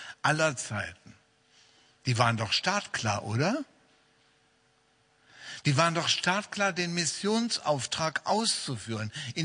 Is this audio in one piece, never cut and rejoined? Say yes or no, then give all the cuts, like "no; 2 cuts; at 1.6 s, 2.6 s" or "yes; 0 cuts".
yes; 0 cuts